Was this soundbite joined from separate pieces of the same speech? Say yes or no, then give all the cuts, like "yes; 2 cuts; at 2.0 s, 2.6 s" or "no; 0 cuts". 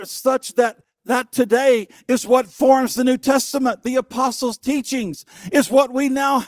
no; 0 cuts